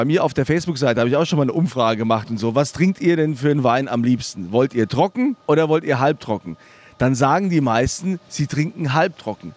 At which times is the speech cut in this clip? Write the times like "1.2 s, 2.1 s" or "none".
5.4 s